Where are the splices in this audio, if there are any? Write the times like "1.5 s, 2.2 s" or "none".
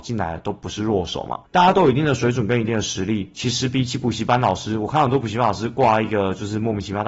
1.5 s